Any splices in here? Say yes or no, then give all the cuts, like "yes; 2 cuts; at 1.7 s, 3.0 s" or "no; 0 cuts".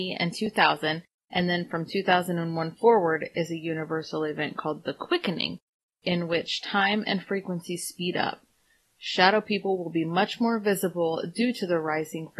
no; 0 cuts